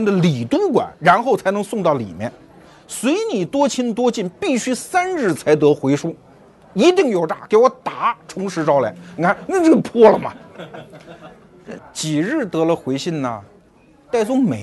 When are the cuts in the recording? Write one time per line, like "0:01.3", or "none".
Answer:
0:11.8